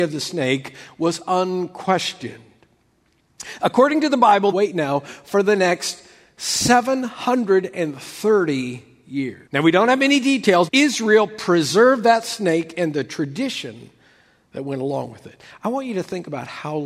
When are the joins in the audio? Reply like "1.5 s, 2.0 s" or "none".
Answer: 4.5 s, 9.5 s, 10.7 s